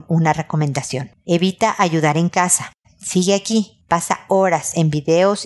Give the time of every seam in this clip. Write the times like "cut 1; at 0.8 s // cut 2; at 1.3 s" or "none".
cut 1; at 2.8 s